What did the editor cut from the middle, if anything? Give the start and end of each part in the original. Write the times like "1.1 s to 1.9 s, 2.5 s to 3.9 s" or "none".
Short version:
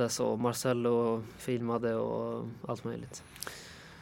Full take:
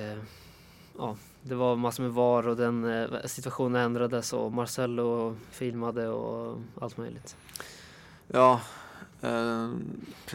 none